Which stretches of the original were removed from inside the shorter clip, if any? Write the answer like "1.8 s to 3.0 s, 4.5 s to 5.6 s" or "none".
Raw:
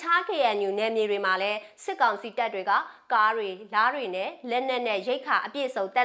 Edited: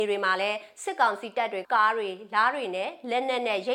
2.6 s to 3.0 s